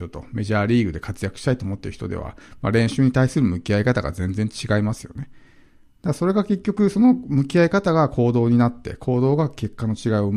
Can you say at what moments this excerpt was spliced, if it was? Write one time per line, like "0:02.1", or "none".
none